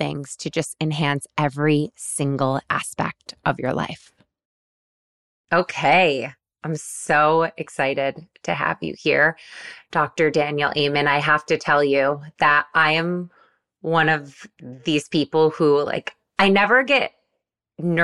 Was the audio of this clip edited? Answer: no; 0 cuts

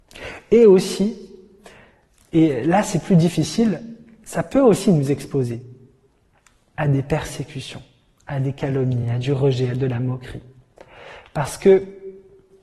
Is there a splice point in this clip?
no; 0 cuts

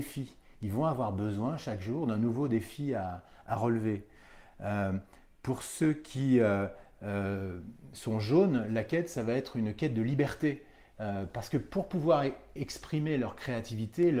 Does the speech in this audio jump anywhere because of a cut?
no; 0 cuts

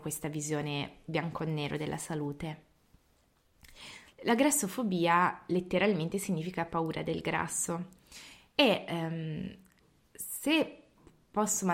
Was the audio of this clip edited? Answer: yes; 1 cut; at 4.1 s

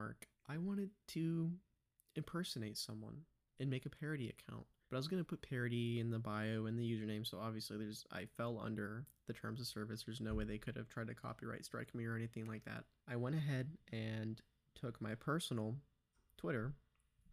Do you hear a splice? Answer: no; 0 cuts

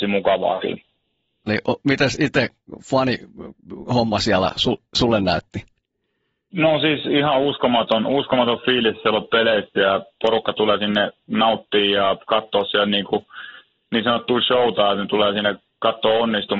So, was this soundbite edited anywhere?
yes; 1 cut; at 1.5 s

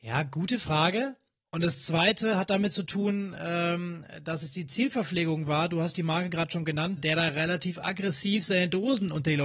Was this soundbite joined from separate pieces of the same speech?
yes; 2 cuts; at 1.4 s, 7.0 s

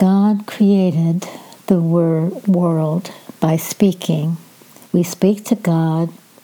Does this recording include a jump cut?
yes; 1 cut; at 4.8 s

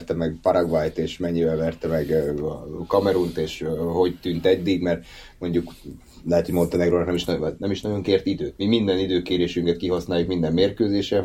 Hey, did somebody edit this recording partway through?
no; 0 cuts

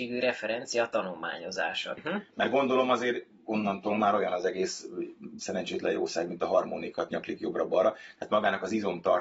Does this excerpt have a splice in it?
yes; 2 cuts; at 2.0 s, 7.1 s

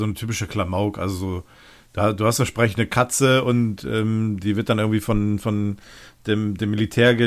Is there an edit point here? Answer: no; 0 cuts

